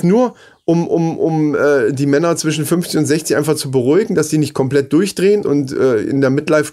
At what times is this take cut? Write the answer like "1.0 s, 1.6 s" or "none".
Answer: 5.4 s